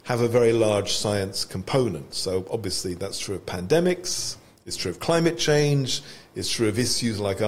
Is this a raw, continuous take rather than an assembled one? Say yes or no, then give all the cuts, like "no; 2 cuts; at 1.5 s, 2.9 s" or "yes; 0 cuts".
yes; 0 cuts